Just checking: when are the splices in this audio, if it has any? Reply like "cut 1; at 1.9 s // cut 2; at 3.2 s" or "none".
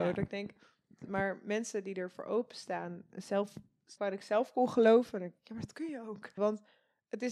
cut 1; at 4.0 s // cut 2; at 6.4 s

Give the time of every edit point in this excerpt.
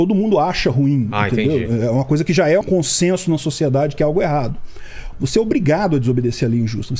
cut 1; at 2.6 s // cut 2; at 5.1 s

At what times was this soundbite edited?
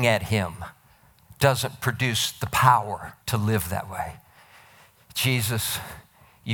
cut 1; at 3.2 s

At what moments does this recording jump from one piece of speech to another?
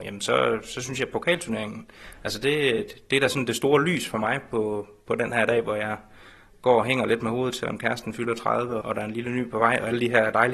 cut 1; at 8.8 s

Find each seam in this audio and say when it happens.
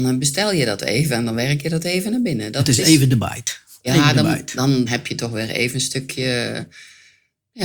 cut 1; at 4.9 s

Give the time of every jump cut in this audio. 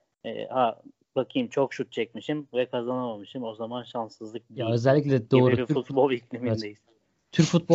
none

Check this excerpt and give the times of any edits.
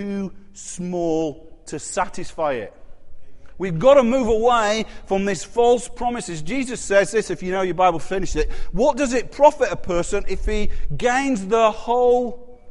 none

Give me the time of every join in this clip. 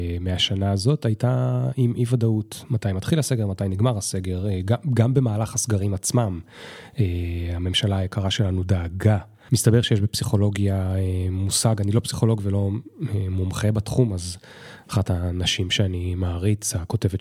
cut 1; at 9.5 s // cut 2; at 14.8 s

